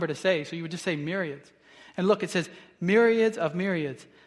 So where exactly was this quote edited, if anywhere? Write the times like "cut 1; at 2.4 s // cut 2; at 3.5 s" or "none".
none